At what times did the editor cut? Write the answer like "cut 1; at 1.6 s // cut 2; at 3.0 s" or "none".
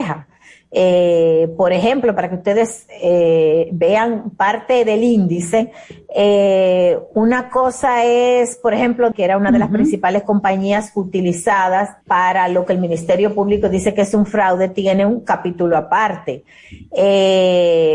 cut 1; at 9.1 s // cut 2; at 12.0 s